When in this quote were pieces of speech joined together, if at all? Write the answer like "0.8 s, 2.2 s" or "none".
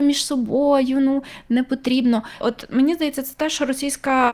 2.4 s